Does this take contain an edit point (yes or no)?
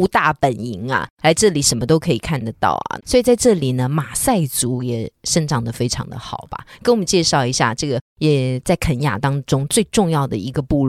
yes